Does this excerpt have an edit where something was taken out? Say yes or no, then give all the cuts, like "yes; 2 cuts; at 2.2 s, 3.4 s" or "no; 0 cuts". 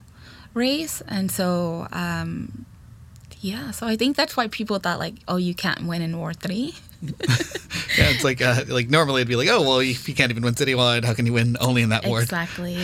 no; 0 cuts